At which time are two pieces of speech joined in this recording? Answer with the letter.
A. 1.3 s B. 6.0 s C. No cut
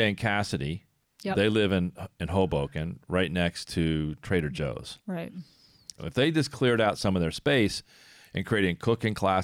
B